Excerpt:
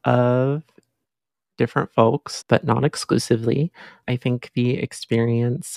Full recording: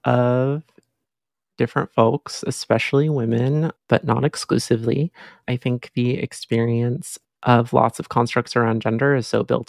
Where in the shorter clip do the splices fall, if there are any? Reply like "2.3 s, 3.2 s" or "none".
2.4 s